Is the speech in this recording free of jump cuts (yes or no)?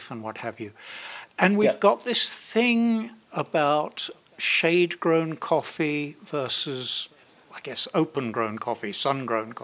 yes